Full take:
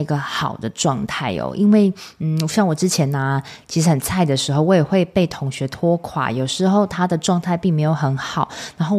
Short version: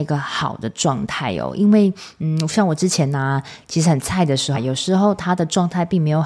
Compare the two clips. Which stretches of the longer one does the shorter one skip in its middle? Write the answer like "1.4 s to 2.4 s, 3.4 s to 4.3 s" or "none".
4.5 s to 6.3 s